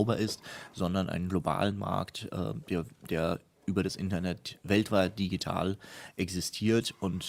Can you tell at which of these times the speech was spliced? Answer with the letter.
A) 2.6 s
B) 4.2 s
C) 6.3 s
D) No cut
D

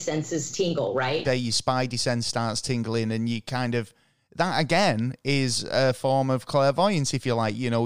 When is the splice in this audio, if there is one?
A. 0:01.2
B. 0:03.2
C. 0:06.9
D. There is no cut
A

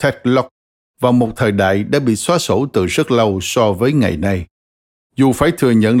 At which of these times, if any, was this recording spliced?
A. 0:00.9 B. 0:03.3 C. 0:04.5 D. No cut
D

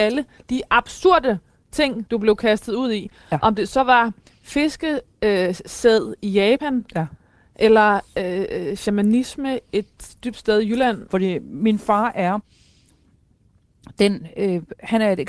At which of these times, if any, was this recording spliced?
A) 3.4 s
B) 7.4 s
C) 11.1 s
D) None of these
C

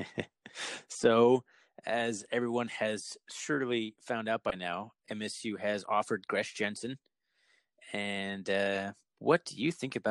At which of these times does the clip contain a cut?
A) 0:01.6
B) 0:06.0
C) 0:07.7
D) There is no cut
D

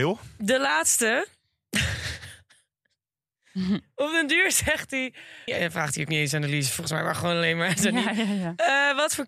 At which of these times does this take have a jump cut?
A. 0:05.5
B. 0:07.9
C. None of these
A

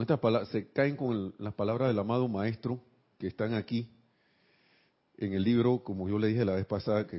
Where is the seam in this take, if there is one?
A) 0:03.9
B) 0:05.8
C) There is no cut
C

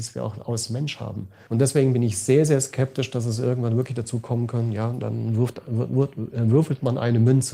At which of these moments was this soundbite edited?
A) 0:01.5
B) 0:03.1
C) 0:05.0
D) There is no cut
A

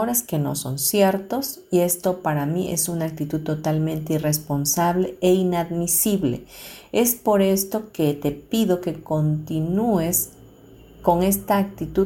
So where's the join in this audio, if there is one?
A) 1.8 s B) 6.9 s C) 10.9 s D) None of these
D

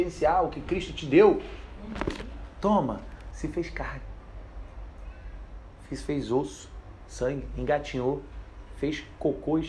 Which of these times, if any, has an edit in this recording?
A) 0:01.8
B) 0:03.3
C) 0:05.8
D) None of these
B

